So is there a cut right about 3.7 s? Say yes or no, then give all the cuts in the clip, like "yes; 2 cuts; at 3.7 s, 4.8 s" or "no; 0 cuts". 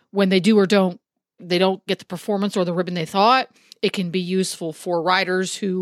no; 1 cut; at 1.4 s